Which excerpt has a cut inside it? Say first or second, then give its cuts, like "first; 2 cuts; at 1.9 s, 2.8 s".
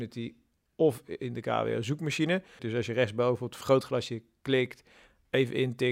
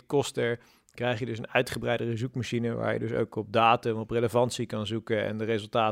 first; 1 cut; at 2.6 s